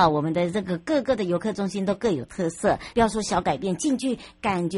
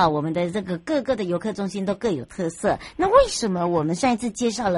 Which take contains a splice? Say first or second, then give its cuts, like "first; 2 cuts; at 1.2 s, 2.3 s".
first; 1 cut; at 2.9 s